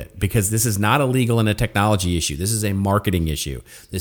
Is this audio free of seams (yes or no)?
yes